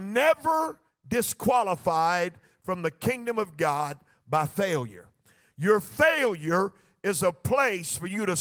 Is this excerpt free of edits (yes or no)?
yes